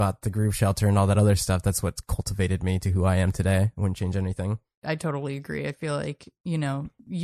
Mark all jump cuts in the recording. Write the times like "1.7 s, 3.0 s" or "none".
none

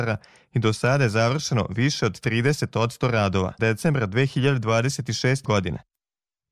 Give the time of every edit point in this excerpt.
3.6 s, 5.4 s

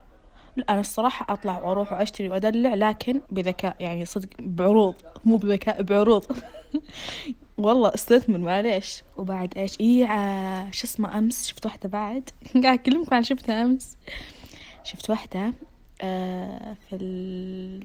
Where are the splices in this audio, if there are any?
3.2 s, 9.1 s

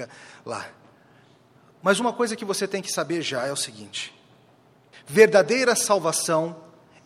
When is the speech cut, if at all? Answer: 4.9 s

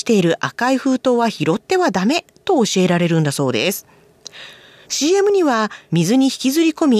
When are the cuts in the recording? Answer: 4.8 s

